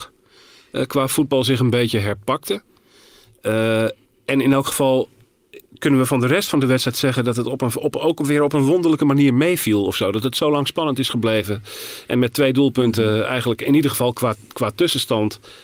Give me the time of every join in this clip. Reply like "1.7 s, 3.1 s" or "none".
none